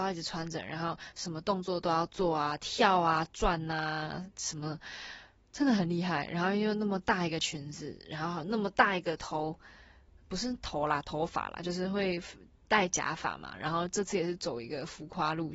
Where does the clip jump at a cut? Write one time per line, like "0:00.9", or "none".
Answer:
none